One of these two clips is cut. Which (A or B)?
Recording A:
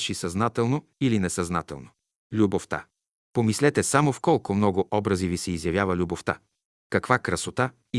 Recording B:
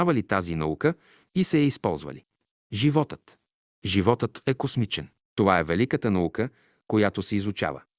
B